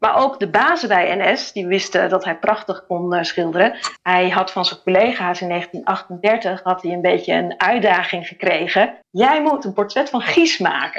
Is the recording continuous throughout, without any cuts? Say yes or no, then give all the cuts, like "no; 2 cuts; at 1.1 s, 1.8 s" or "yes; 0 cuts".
no; 2 cuts; at 4.0 s, 9.0 s